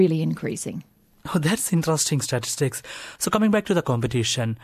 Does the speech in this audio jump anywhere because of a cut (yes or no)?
no